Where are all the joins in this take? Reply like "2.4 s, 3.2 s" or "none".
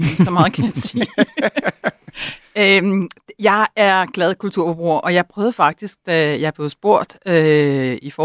none